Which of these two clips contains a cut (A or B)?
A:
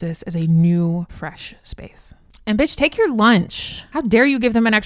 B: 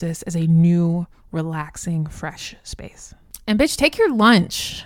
A